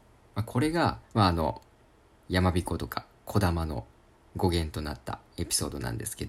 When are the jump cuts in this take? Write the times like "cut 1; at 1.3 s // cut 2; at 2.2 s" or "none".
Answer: cut 1; at 1.0 s